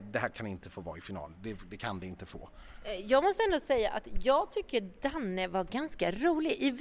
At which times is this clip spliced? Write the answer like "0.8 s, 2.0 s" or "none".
none